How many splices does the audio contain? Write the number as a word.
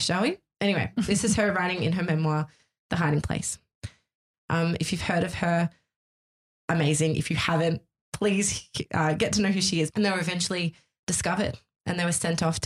two